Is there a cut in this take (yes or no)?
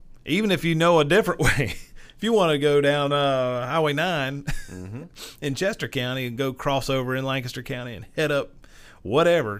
no